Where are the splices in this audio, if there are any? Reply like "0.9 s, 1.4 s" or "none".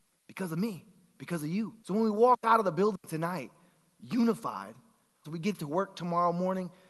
1.8 s, 5.2 s